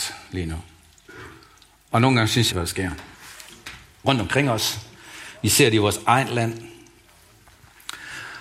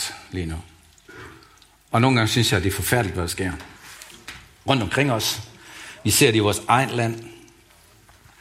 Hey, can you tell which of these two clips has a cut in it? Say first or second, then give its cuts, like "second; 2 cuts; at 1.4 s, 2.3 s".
first; 1 cut; at 2.5 s